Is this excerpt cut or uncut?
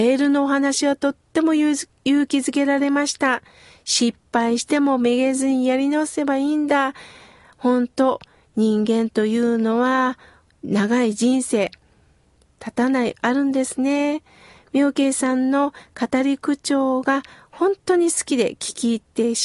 cut